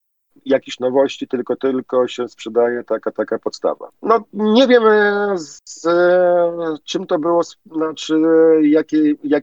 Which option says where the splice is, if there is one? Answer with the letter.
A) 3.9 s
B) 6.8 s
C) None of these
A